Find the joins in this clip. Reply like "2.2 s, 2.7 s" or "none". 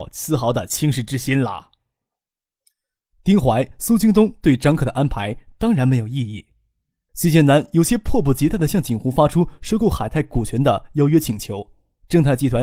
none